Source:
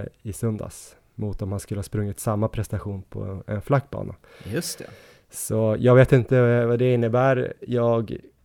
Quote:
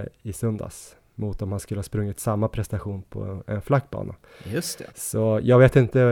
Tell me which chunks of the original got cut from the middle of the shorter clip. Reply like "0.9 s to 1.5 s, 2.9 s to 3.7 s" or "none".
4.9 s to 5.3 s